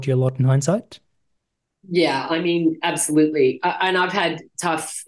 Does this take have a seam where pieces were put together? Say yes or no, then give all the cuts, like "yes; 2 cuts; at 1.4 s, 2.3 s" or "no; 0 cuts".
no; 0 cuts